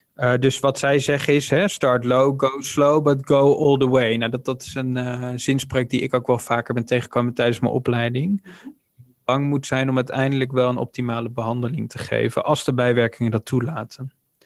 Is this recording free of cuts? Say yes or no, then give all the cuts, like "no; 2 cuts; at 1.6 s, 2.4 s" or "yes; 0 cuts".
yes; 0 cuts